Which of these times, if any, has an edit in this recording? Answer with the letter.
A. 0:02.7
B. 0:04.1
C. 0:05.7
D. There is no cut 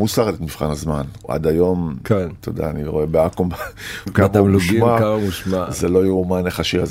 B